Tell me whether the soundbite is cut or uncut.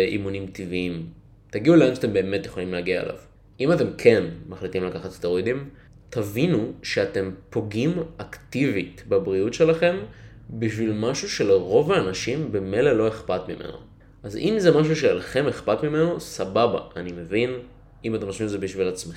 uncut